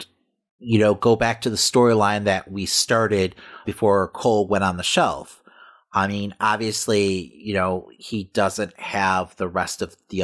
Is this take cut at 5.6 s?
no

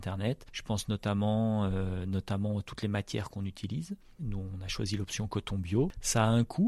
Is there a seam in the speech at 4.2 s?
yes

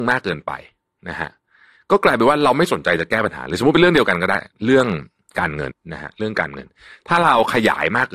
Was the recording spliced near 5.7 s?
yes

